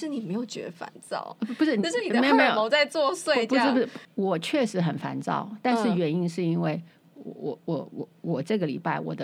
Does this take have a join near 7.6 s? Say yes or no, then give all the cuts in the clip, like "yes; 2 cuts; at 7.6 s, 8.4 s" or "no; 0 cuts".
no; 1 cut; at 4.0 s